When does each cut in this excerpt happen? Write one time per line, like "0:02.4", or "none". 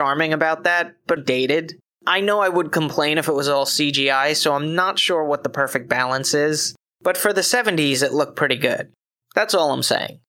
0:01.2
0:09.2